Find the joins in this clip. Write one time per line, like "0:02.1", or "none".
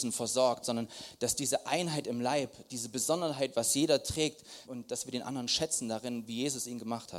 0:04.6